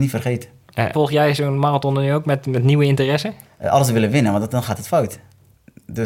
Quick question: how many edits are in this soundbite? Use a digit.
2